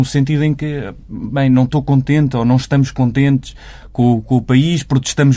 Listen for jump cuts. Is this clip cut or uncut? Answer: uncut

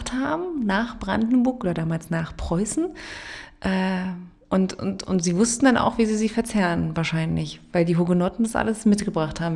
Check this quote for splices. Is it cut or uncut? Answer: uncut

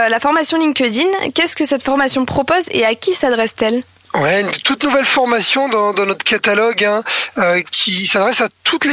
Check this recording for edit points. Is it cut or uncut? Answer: uncut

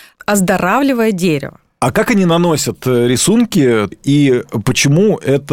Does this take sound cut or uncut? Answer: cut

